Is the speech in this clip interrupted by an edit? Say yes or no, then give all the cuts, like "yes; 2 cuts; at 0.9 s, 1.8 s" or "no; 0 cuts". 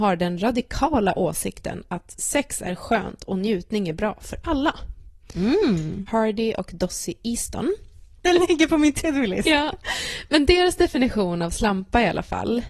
yes; 2 cuts; at 6.1 s, 8.2 s